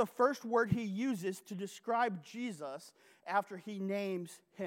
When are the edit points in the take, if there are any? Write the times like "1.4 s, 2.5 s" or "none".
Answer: none

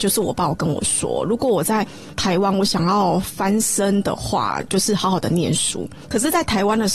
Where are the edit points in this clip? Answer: 4.7 s, 6.0 s

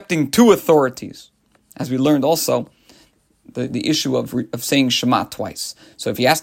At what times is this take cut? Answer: none

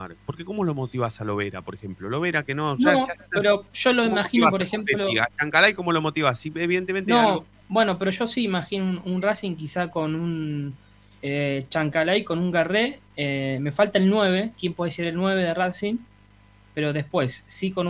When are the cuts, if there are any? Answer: none

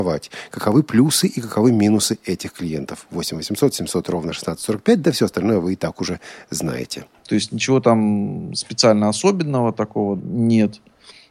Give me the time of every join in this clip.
7.2 s, 10.2 s

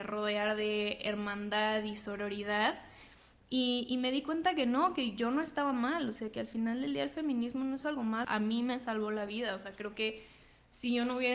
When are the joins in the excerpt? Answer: 8.2 s

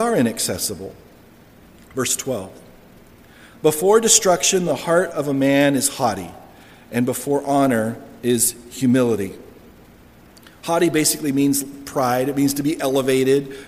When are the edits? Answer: none

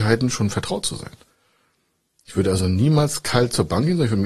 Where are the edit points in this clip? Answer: none

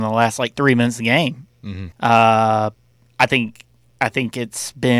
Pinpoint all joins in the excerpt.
1.9 s

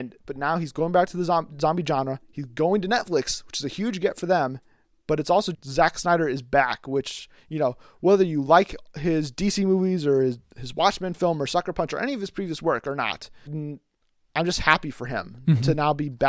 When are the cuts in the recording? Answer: 5.5 s, 13.5 s

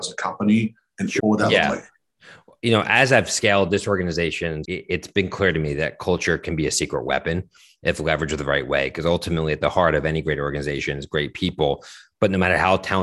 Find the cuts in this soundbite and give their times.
1.2 s, 4.6 s

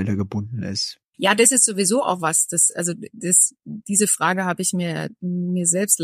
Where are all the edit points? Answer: none

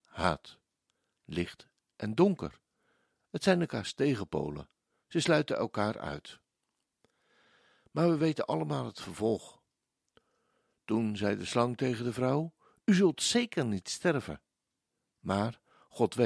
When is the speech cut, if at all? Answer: none

